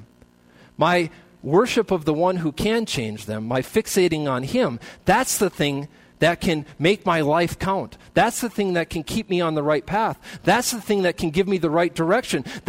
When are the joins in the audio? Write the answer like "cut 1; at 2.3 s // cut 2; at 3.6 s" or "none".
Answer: none

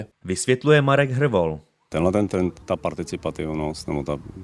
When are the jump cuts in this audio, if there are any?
cut 1; at 2.6 s

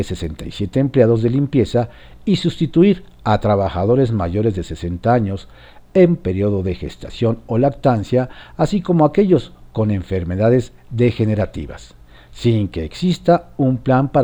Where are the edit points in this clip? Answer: none

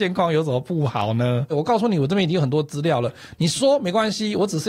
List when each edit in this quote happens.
cut 1; at 1.5 s

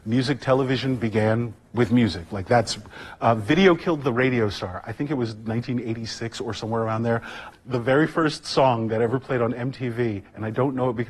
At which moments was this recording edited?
cut 1; at 7.5 s

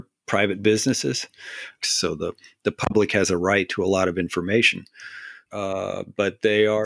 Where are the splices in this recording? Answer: cut 1; at 1.8 s // cut 2; at 5.5 s

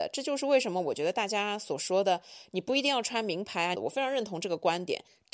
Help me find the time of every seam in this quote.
cut 1; at 3.7 s

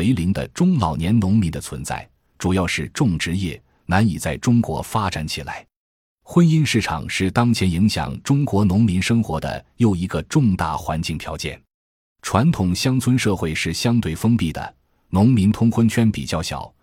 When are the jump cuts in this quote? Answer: cut 1; at 2.3 s

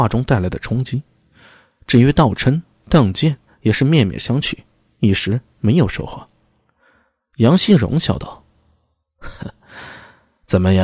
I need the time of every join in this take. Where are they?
cut 1; at 3.5 s // cut 2; at 9.4 s

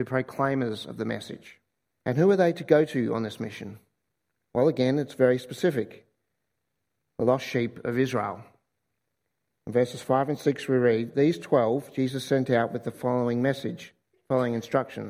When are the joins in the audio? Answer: cut 1; at 1.9 s

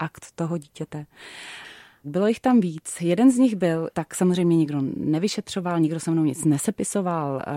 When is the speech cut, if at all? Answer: cut 1; at 2.0 s // cut 2; at 3.9 s

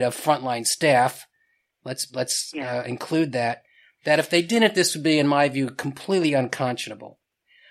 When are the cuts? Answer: none

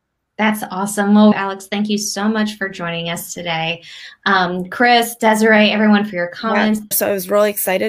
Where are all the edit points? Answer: cut 1; at 1.3 s // cut 2; at 6.9 s

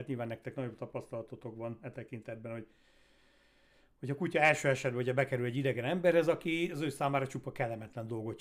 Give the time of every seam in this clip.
none

